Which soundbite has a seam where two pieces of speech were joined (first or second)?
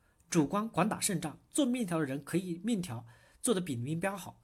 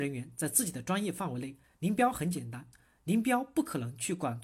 second